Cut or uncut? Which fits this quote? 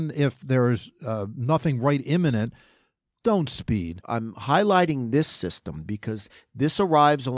cut